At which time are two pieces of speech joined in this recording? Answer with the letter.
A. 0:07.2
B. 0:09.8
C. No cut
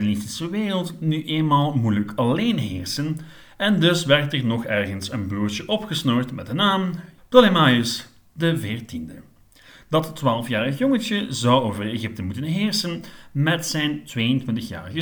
A